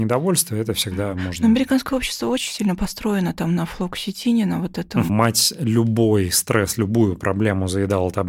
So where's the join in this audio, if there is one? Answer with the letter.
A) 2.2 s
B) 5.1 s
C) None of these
B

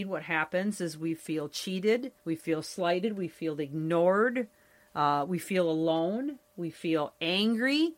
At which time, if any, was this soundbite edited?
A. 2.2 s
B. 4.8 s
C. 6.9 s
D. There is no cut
A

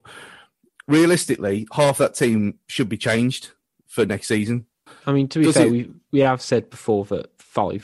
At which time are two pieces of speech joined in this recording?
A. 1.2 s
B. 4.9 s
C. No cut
B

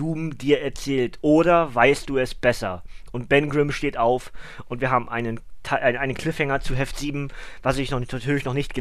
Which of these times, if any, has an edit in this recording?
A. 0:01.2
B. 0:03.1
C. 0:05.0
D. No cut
D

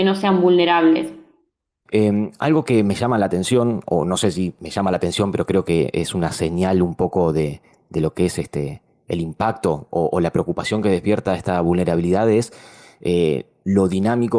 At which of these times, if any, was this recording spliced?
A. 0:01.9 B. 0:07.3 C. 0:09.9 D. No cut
A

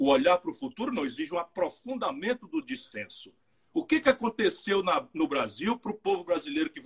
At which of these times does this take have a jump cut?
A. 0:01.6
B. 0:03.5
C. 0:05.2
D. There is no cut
B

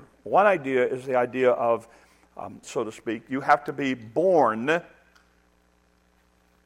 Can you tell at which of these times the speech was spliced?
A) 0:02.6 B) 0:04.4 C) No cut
A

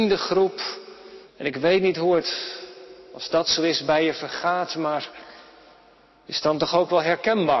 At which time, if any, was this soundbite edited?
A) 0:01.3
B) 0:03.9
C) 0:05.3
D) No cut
A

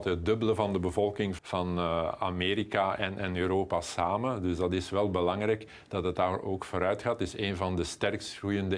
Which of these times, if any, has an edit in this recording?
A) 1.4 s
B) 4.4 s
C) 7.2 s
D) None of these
A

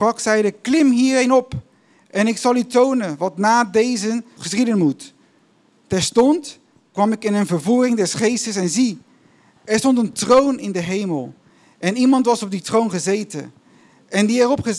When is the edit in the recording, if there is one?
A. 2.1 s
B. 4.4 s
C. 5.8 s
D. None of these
B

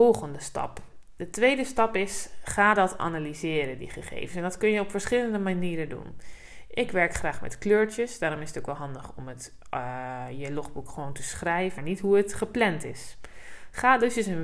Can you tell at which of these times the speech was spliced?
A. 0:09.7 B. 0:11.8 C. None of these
B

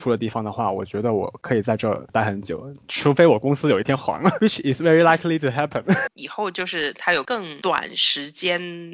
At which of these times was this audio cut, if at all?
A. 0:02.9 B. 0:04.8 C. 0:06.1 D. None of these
C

